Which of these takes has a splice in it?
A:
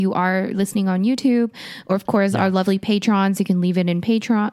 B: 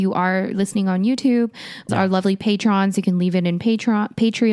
B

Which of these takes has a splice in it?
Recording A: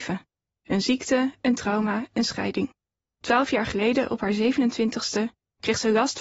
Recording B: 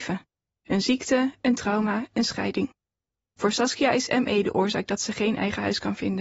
A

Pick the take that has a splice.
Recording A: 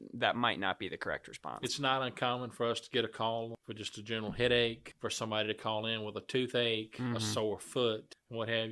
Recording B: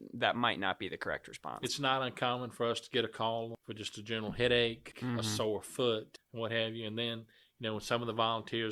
B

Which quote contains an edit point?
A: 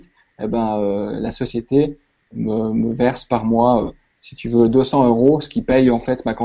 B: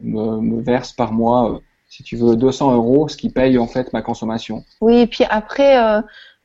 B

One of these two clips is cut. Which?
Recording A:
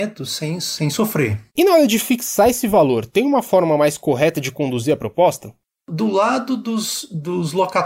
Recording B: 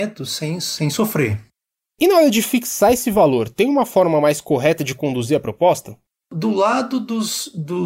A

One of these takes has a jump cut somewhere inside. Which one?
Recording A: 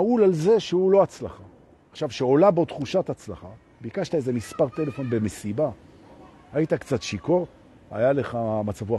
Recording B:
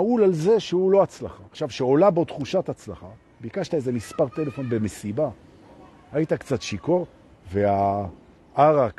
B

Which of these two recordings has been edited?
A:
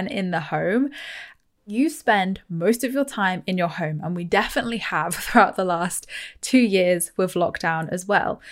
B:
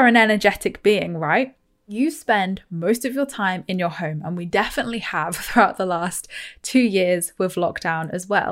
A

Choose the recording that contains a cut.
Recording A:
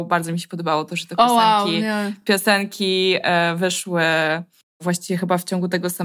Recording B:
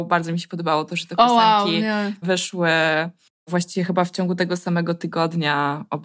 B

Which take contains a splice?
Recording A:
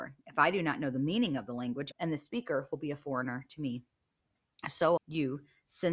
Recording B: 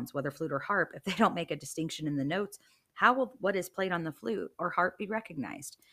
A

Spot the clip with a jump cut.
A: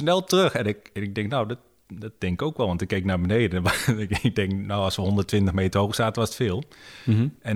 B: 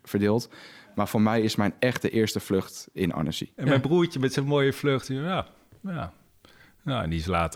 B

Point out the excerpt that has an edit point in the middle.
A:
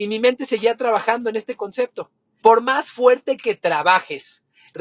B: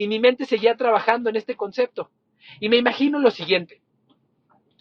A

